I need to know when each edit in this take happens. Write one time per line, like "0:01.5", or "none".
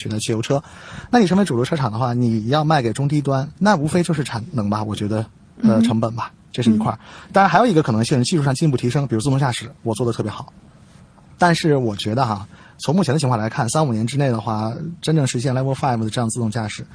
0:03.5